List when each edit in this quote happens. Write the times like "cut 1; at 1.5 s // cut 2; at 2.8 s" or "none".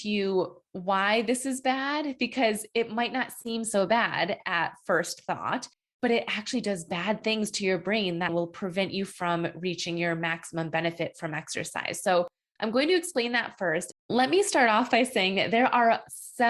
cut 1; at 8.3 s // cut 2; at 13.9 s